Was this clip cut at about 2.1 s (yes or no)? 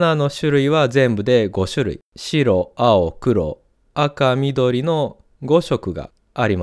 yes